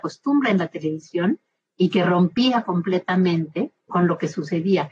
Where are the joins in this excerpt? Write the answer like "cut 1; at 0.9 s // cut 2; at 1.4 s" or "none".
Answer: cut 1; at 3.9 s

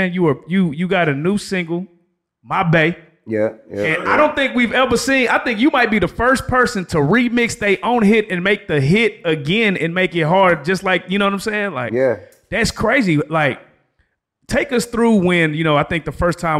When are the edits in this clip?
none

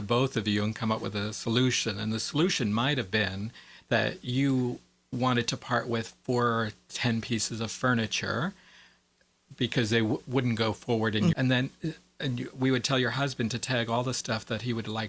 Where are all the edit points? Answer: cut 1; at 11.3 s

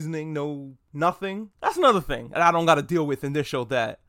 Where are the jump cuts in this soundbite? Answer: cut 1; at 1.5 s

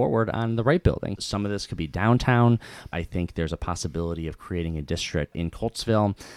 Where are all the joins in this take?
cut 1; at 1.2 s // cut 2; at 2.9 s // cut 3; at 5.3 s

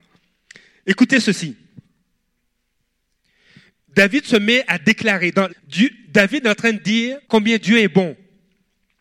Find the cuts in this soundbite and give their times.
cut 1; at 5.5 s // cut 2; at 7.2 s

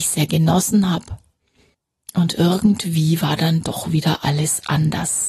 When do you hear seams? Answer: none

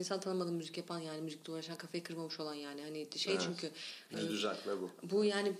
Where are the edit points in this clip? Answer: cut 1; at 4.1 s

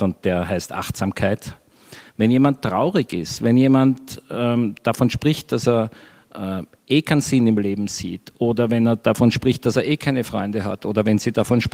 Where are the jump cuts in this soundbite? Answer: cut 1; at 2.1 s

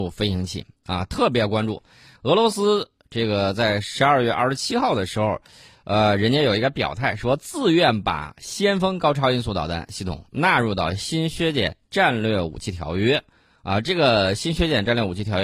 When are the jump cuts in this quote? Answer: none

